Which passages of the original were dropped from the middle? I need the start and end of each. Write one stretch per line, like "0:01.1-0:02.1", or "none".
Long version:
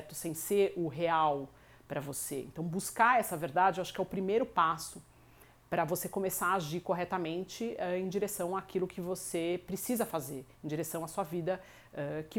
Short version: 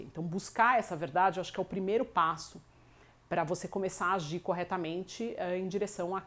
none